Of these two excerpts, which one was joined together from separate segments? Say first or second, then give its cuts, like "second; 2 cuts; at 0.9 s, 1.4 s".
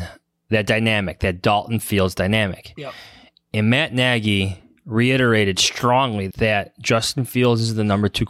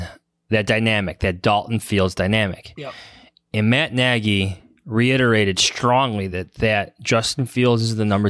first; 1 cut; at 6.3 s